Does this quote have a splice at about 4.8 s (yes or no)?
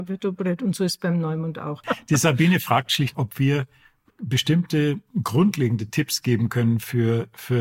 no